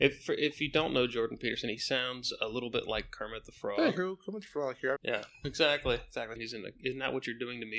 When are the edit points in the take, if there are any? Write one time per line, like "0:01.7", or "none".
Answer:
0:05.0
0:06.4